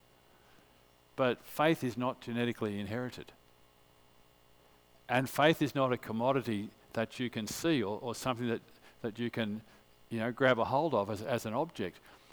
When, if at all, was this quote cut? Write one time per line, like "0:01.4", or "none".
none